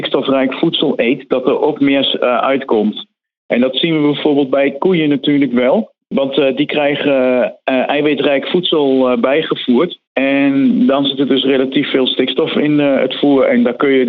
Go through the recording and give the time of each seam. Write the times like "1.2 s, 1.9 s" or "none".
10.1 s